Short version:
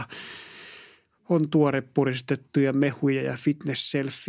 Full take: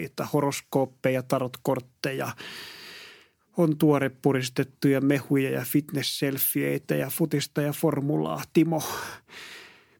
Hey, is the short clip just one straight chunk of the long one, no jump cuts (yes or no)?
yes